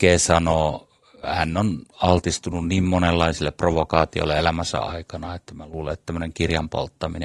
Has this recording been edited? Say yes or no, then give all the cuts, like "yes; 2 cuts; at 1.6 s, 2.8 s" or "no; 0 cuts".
no; 0 cuts